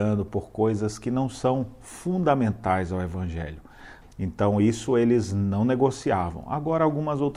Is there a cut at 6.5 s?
no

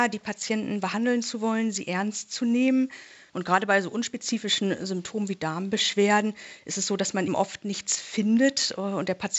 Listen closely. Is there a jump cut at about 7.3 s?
yes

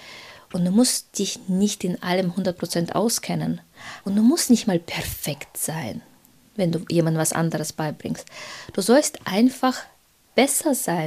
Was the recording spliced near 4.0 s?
yes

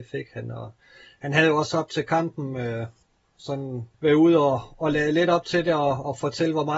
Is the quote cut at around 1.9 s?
no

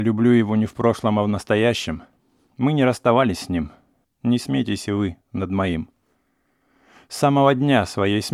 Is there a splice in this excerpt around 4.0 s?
yes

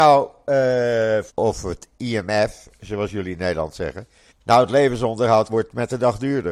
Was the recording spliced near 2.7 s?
no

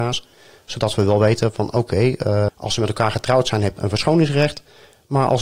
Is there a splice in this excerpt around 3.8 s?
yes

